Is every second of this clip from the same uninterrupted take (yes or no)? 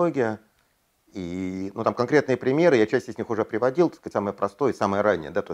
yes